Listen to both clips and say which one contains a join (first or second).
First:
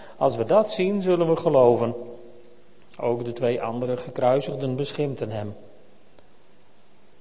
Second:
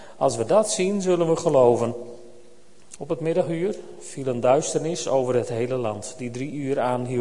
second